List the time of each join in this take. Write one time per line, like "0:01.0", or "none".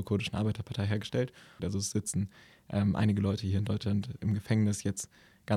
0:01.6